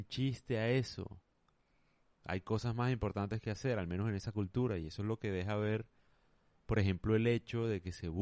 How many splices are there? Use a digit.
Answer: 1